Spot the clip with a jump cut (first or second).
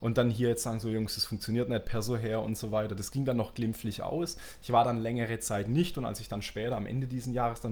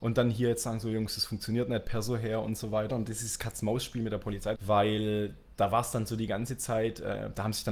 second